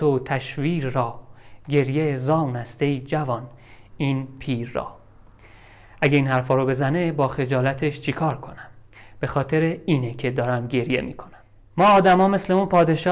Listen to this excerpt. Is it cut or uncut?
uncut